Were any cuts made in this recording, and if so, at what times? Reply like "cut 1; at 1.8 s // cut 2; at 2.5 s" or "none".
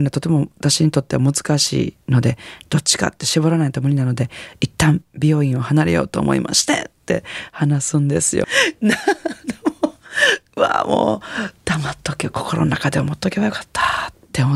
cut 1; at 8.4 s